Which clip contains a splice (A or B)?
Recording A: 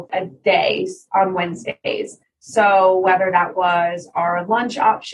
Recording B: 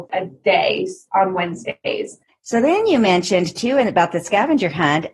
B